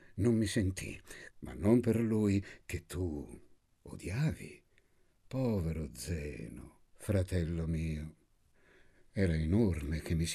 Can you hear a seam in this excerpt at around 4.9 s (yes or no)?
no